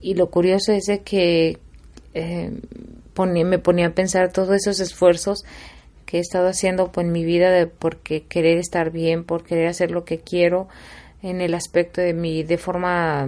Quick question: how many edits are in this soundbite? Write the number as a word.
zero